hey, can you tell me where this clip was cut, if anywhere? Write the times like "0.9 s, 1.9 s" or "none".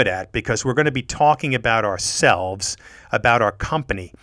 none

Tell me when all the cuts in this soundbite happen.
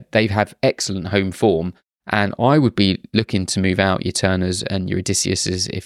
1.9 s

